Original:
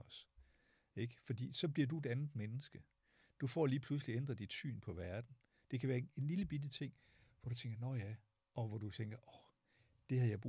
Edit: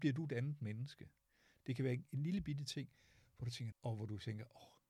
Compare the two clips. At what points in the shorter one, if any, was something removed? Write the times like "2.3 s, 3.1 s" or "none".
1.6 s, 3.7 s